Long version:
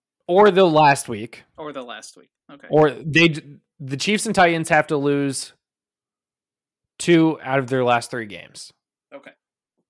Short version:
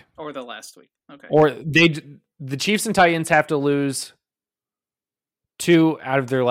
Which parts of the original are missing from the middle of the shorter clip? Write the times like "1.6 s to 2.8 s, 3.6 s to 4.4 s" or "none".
none